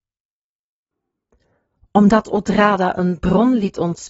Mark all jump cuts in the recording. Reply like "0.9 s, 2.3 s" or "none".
none